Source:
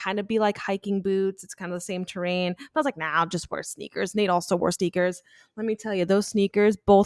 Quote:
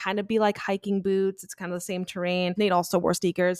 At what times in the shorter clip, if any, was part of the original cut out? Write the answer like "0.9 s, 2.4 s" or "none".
2.6 s